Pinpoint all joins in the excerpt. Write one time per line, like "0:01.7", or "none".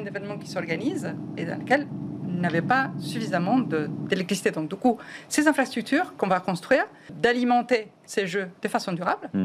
0:07.1